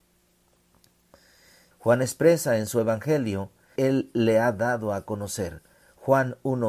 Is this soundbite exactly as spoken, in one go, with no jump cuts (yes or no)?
no